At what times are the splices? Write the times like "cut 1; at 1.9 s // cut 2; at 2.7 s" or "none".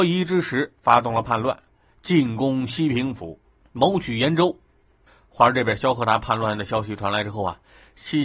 none